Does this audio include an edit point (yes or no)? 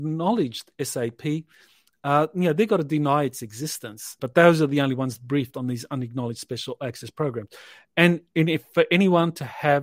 yes